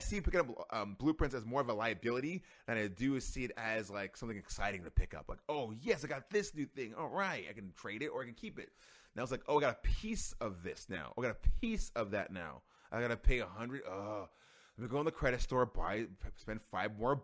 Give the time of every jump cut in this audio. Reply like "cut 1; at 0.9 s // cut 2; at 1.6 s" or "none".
none